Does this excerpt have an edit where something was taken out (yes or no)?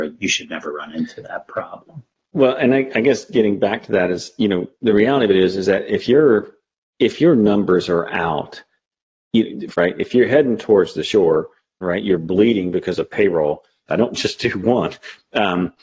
yes